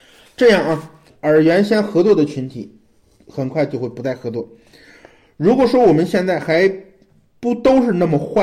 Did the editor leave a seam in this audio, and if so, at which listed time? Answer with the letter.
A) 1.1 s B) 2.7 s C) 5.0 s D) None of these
A